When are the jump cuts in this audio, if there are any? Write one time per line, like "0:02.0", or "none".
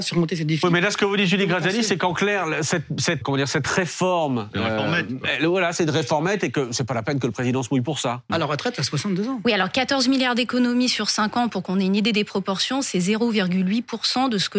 0:03.2
0:08.3